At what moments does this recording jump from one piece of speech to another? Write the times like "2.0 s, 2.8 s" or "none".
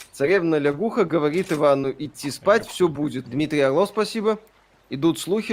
3.2 s